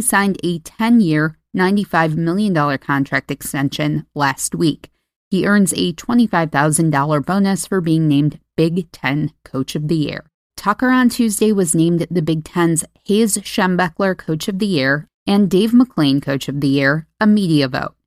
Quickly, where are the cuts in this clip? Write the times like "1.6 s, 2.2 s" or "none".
10.5 s, 15.1 s